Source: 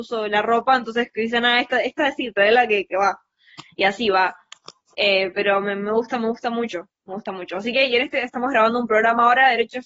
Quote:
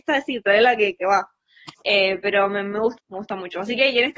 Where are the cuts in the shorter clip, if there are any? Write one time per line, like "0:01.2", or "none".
0:01.7
0:03.0